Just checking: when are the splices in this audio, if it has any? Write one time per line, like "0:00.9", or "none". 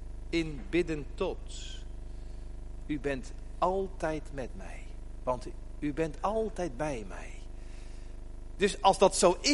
0:02.8